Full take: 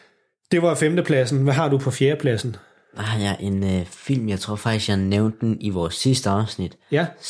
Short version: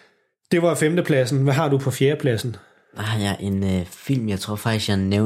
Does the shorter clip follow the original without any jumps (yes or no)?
yes